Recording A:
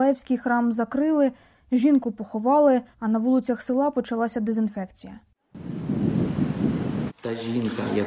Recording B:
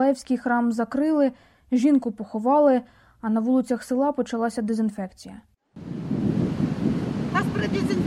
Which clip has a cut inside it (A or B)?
A